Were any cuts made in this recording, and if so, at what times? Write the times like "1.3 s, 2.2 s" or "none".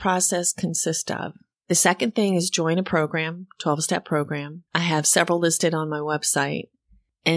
1.5 s, 4.7 s

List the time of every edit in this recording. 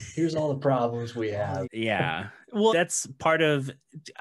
1.6 s, 2.7 s

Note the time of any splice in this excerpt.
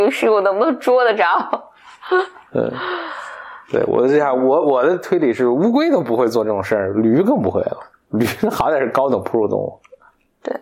none

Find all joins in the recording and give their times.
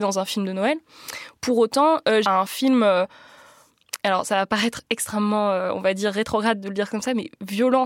2.2 s

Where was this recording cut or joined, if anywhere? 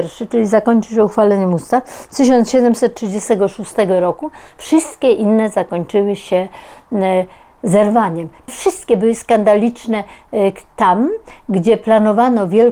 8.5 s

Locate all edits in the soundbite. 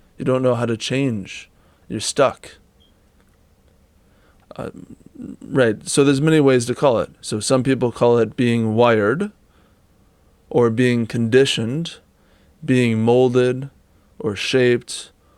4.4 s

